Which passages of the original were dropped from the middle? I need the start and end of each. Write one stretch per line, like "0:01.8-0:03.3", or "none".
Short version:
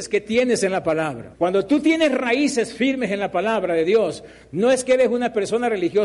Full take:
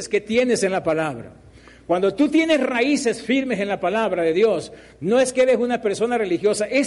0:01.3-0:01.8